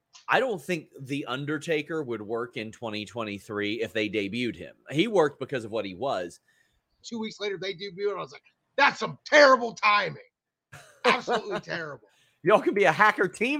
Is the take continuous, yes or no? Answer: no